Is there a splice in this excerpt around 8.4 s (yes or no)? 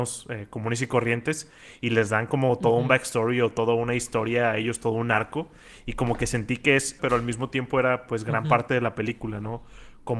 no